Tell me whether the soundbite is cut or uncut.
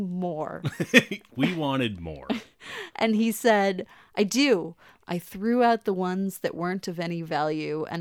uncut